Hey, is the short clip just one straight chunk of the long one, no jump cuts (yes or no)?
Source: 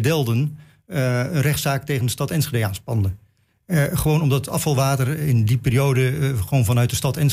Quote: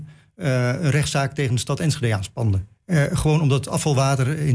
no